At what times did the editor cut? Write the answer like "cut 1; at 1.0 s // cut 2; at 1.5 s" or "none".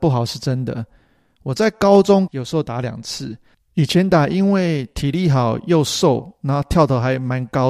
cut 1; at 2.3 s